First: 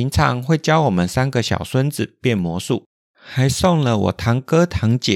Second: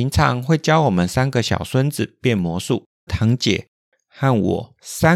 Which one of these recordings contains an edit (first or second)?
second